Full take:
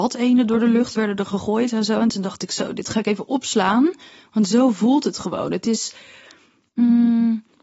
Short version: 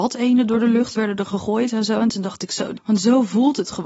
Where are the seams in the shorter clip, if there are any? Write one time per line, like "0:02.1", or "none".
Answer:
0:02.7